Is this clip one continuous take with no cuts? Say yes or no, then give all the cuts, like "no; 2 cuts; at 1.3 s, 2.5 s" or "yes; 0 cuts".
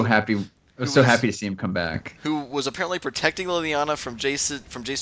yes; 0 cuts